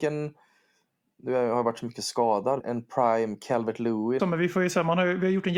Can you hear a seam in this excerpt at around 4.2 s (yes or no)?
yes